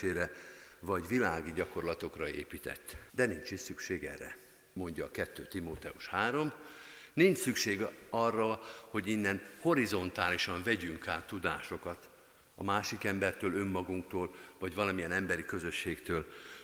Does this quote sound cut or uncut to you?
cut